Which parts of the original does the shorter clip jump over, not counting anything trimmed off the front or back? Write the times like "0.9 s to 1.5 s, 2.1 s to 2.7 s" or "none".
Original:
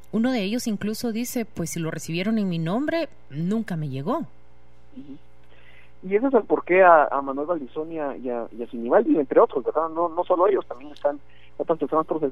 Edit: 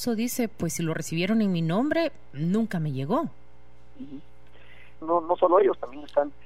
6.0 s to 9.9 s